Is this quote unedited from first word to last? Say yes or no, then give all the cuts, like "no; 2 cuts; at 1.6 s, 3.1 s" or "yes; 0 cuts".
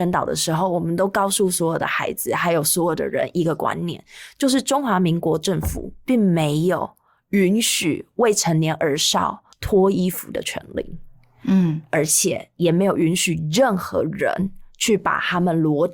no; 1 cut; at 9.5 s